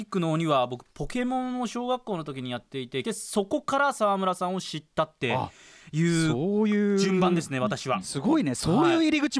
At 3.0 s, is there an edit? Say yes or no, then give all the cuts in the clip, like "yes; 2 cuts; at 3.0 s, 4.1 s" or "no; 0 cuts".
yes; 1 cut; at 3.0 s